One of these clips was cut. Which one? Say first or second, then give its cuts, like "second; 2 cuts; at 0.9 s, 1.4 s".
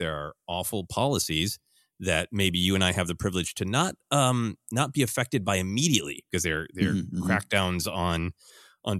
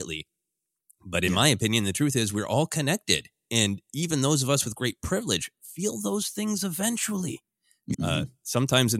second; 1 cut; at 7.9 s